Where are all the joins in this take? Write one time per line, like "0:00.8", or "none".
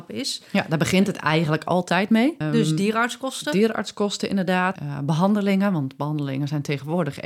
0:02.4
0:04.8